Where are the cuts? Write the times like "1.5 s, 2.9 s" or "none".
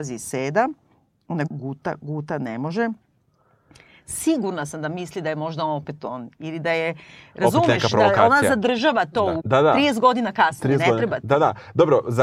1.5 s, 9.4 s